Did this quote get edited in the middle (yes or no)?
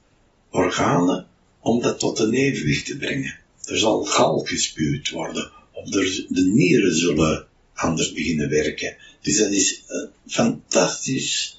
no